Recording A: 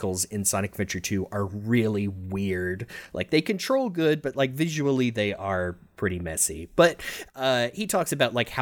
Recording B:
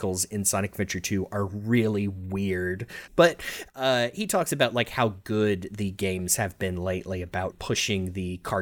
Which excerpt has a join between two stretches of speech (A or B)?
B